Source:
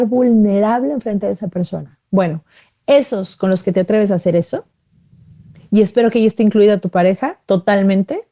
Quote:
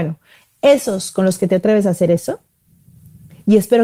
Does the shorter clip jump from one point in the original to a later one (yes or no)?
no